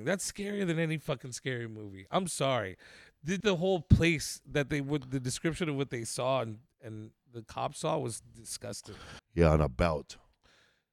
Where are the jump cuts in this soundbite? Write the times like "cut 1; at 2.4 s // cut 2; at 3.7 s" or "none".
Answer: cut 1; at 3.4 s // cut 2; at 9.2 s